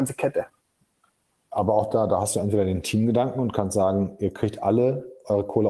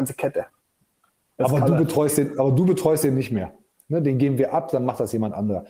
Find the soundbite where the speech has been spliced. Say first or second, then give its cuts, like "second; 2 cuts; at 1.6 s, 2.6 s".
second; 1 cut; at 1.4 s